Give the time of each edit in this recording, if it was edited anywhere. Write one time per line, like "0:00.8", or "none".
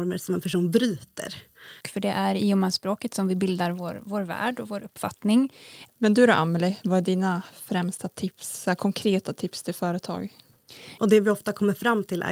0:01.8
0:05.9
0:11.0